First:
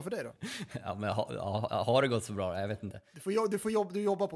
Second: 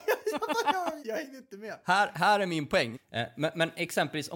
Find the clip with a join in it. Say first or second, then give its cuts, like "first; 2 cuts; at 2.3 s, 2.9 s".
second; 2 cuts; at 1.0 s, 2.9 s